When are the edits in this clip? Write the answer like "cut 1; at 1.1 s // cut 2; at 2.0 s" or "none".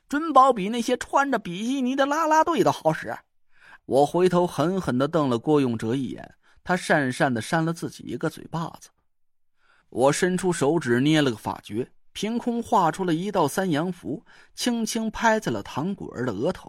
cut 1; at 3.8 s